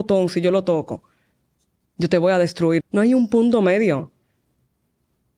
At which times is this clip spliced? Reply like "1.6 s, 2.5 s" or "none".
2.8 s